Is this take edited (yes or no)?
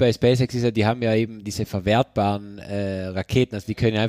no